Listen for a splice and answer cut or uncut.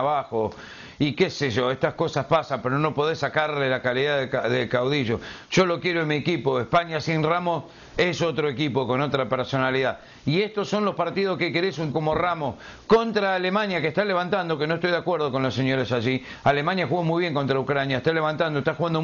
cut